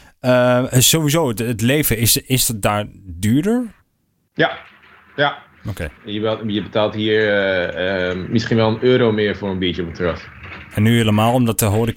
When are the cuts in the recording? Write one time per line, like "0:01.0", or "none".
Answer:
0:06.0
0:10.7